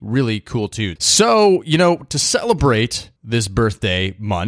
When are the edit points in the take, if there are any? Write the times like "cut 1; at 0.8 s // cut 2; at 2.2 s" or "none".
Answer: cut 1; at 1.0 s // cut 2; at 3.2 s